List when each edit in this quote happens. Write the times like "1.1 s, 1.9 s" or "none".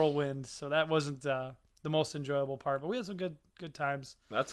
none